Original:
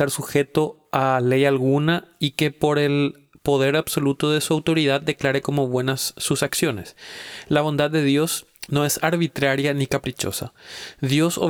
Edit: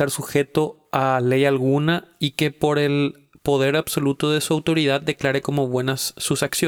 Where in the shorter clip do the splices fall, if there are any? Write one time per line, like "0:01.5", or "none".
none